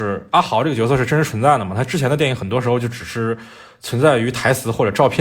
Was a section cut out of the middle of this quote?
no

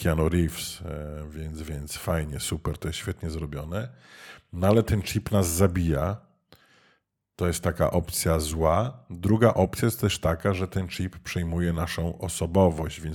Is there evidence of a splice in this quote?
no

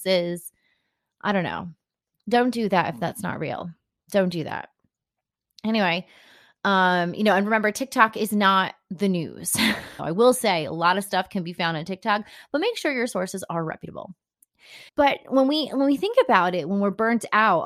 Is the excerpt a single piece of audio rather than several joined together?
no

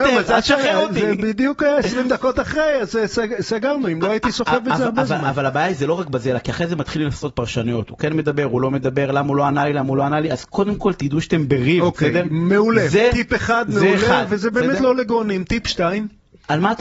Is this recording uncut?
yes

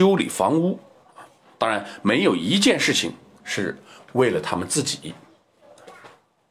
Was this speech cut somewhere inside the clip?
no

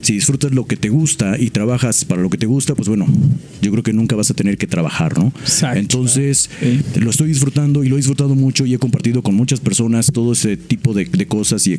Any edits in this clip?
no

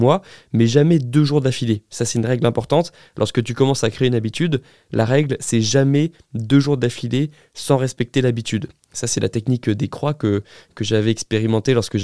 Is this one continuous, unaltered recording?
yes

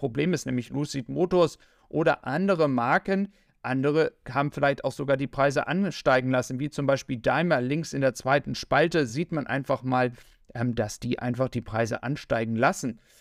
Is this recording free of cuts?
yes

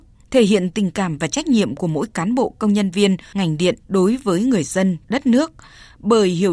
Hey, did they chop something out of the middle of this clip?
yes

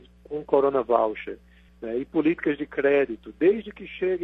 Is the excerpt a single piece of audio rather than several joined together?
yes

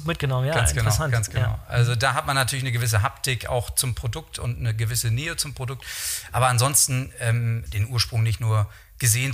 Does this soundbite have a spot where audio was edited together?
yes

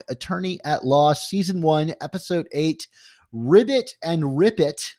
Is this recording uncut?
yes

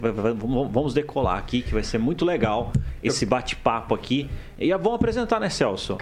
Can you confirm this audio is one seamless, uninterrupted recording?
yes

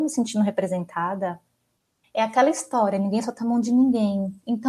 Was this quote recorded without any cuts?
no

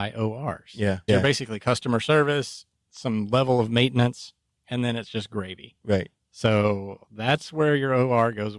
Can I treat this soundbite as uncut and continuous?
no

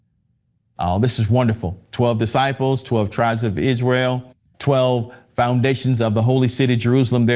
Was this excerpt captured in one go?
no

